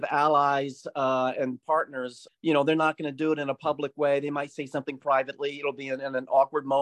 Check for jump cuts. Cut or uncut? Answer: cut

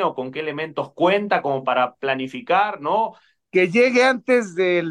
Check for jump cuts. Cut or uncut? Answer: cut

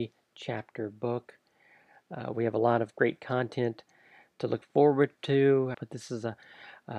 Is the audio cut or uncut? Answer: cut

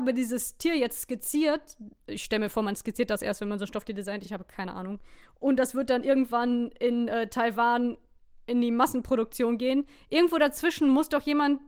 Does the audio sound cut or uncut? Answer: uncut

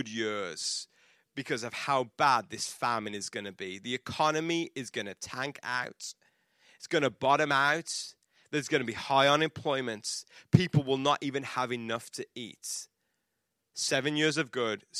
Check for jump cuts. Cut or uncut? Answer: uncut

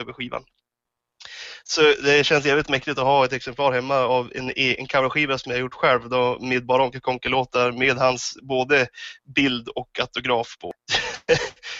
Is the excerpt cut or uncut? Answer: cut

